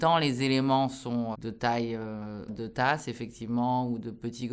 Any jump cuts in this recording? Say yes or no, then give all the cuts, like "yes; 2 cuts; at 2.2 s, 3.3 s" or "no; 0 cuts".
yes; 2 cuts; at 1.3 s, 2.5 s